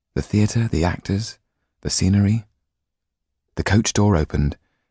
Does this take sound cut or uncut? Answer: cut